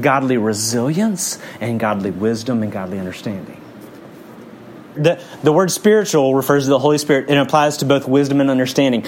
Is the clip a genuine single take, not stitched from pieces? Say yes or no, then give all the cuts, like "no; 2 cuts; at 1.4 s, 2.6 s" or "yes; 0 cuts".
no; 1 cut; at 5.0 s